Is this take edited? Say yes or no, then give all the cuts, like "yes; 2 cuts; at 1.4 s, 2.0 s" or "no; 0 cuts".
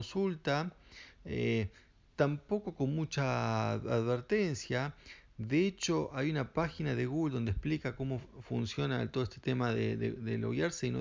no; 0 cuts